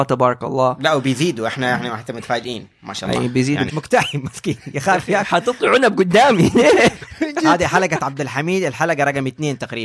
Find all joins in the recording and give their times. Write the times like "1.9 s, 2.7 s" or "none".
3.7 s